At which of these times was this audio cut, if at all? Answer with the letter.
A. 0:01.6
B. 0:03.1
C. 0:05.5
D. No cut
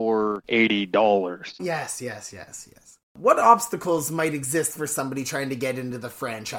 A